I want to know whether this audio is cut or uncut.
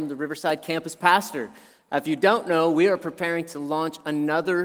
uncut